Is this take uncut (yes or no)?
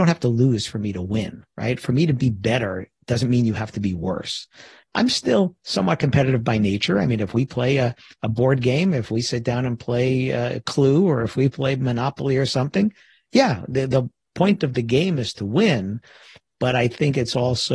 no